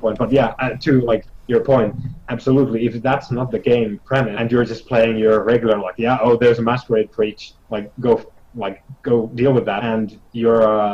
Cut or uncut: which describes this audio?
uncut